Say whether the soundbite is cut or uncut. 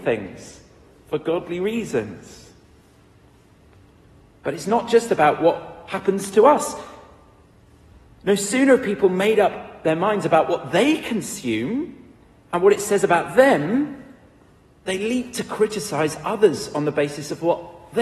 cut